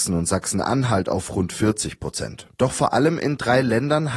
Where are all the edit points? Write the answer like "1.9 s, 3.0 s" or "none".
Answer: 2.6 s